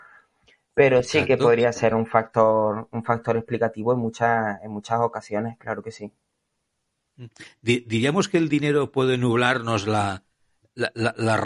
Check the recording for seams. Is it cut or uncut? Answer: uncut